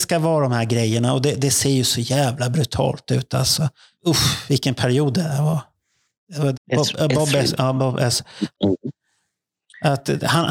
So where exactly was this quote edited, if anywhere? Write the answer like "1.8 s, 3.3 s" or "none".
6.5 s, 8.5 s